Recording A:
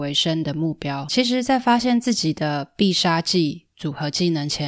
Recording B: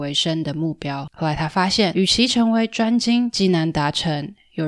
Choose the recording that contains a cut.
B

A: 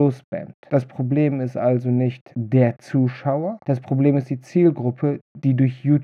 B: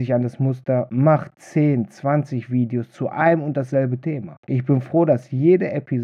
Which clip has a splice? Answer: B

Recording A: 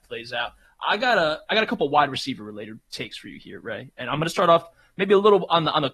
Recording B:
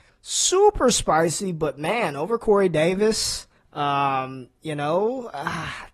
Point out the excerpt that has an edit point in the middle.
A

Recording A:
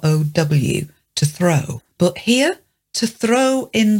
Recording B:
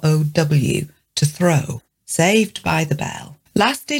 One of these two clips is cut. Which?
B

